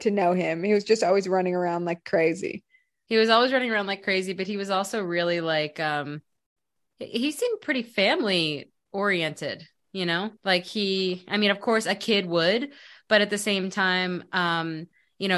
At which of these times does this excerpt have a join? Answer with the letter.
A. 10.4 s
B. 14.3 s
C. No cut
A